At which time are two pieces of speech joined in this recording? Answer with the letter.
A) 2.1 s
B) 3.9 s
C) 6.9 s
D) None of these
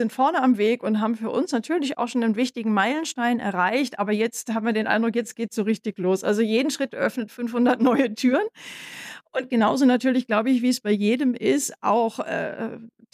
C